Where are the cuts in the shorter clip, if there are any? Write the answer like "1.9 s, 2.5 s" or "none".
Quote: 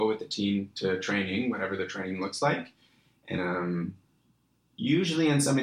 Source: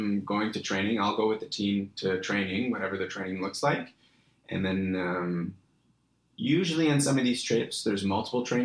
3.4 s